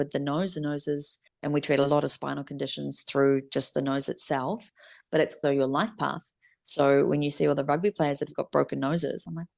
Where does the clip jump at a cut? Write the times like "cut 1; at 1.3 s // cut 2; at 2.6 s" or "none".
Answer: cut 1; at 1.3 s // cut 2; at 5.4 s